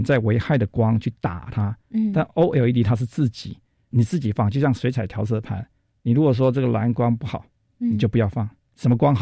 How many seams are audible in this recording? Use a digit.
1